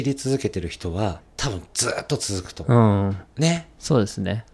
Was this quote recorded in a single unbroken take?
no; 1 cut; at 1.2 s

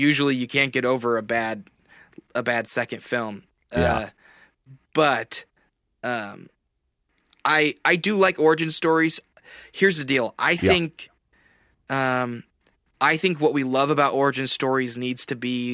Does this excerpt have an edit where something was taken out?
no; 0 cuts

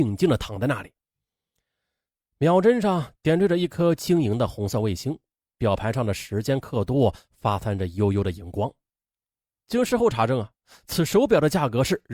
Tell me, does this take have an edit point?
no; 0 cuts

